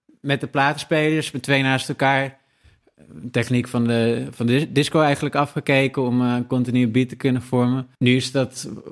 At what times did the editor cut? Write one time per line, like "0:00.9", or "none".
0:07.9